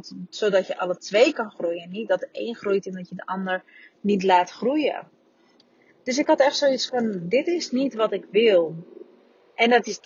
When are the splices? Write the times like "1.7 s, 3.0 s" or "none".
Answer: none

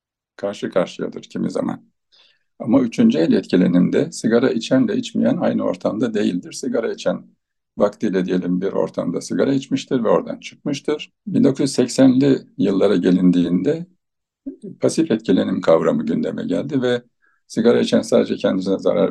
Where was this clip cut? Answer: 11.2 s

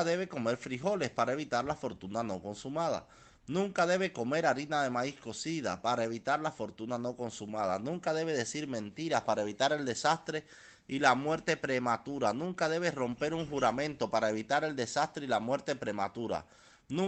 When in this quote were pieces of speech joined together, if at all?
none

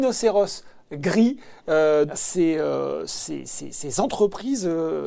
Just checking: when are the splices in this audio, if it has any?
2.1 s

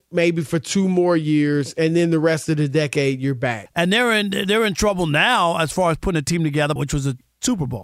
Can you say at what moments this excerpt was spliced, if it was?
3.7 s, 6.8 s

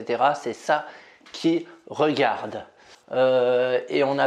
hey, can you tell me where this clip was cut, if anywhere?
2.9 s

